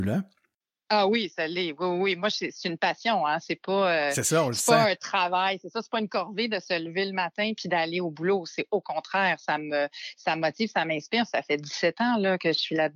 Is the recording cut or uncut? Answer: uncut